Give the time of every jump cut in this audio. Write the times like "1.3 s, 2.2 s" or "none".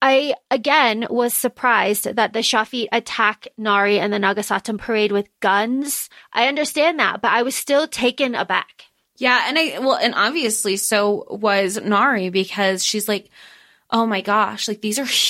6.2 s